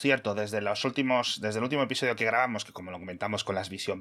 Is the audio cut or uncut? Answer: uncut